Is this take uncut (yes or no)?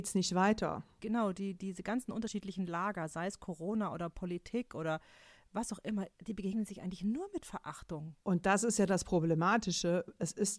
no